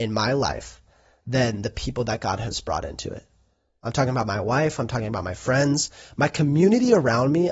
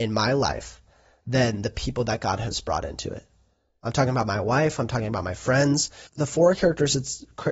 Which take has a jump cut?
second; 1 cut; at 6.1 s

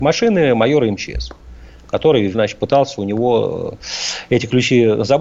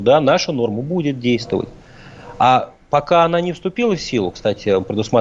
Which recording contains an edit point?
first; 1 cut; at 2.3 s

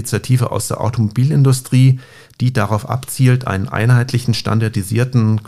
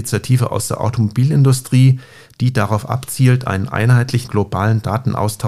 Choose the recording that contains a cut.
second; 1 cut; at 4.3 s

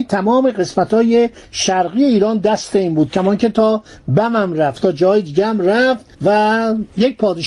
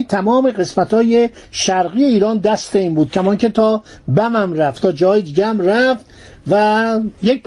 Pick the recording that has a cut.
first; 1 cut; at 6.1 s

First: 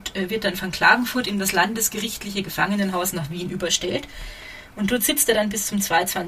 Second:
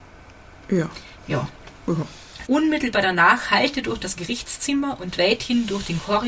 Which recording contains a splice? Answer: second; 1 cut; at 2.5 s

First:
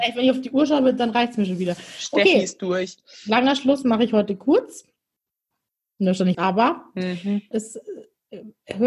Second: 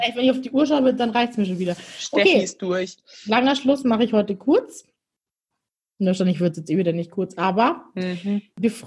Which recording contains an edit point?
first; 2 cuts; at 6.3 s, 7.5 s

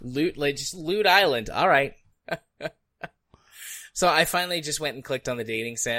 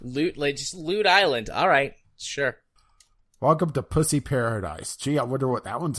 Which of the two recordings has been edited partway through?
first; 1 cut; at 2.1 s

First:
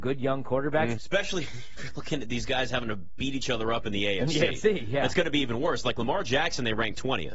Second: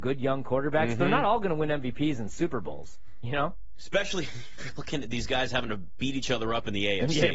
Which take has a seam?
first; 1 cut; at 1.0 s

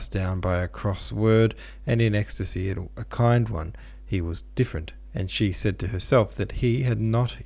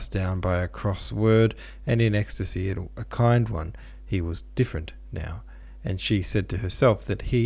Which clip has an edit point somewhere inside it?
first; 1 cut; at 5.1 s

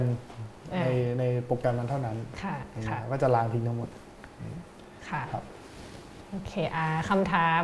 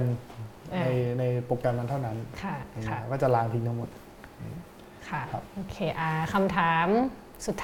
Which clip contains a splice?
second; 1 cut; at 5.5 s

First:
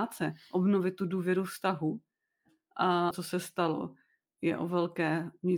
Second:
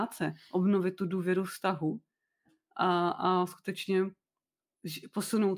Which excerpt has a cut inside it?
first; 1 cut; at 3.1 s

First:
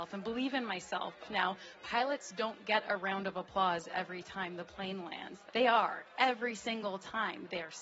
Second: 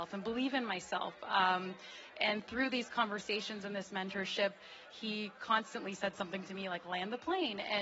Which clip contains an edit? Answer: first; 2 cuts; at 1.2 s, 5.5 s

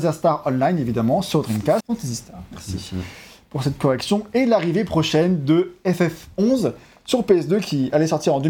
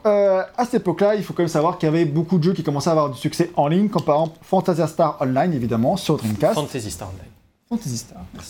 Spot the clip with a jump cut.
first; 1 cut; at 1.8 s

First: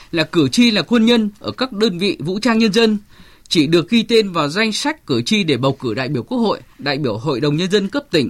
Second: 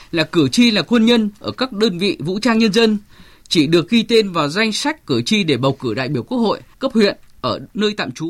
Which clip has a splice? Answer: second; 1 cut; at 6.7 s

